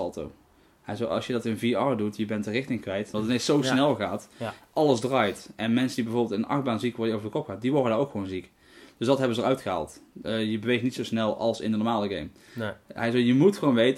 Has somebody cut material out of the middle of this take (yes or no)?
yes